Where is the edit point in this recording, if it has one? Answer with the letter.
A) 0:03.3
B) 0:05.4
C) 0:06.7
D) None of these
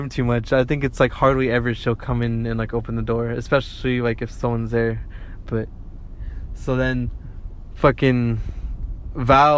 B